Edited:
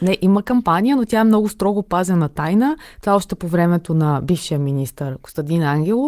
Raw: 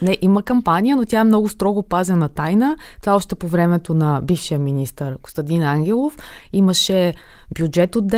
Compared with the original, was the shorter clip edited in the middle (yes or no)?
no